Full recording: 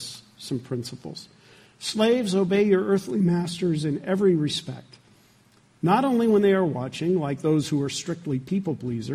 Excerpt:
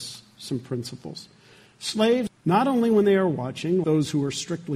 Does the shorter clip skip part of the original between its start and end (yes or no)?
yes